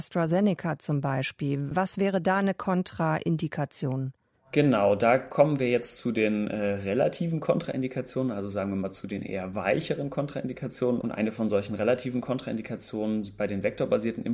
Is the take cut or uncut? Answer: cut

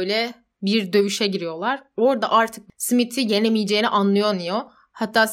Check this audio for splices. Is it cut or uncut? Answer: uncut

